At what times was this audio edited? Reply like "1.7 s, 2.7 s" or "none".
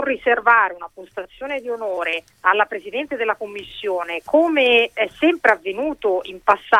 2.3 s